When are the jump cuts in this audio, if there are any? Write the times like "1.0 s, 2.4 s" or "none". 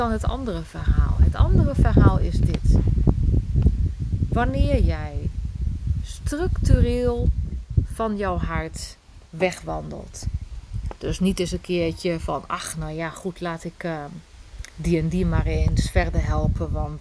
none